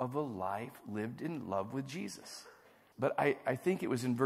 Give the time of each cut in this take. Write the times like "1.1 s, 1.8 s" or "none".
2.9 s